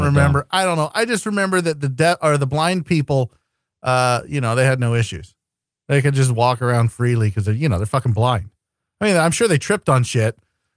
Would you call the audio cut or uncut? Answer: uncut